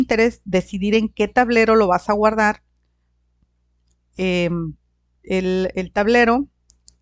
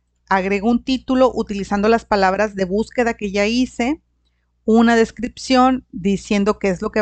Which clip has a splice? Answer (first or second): first